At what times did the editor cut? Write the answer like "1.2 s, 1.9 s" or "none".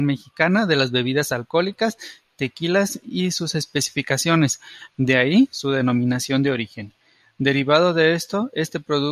4.9 s

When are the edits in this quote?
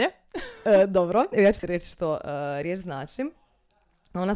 none

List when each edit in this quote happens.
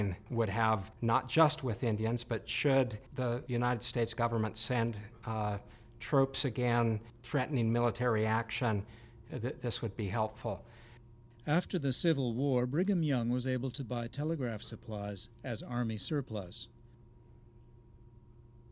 none

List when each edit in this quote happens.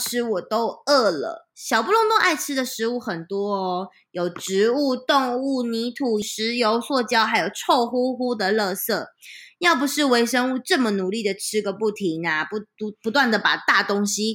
6.2 s

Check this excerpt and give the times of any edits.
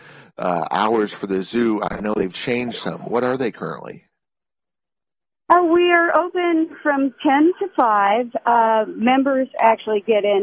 none

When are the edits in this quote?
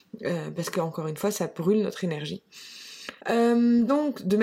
3.2 s

